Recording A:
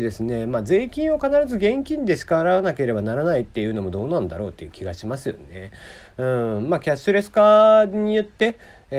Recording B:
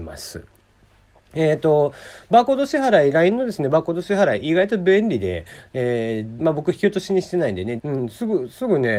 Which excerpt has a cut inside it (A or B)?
B